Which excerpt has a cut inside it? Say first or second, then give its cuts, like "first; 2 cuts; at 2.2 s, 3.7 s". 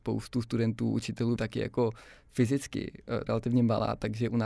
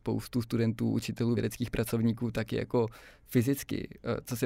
first; 2 cuts; at 1.4 s, 3.3 s